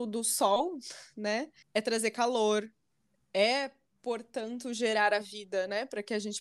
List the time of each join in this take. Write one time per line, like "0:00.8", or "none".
0:01.6